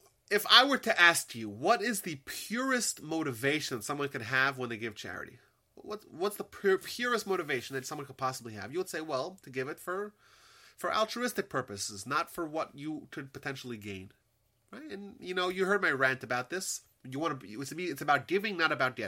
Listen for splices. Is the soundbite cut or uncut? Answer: uncut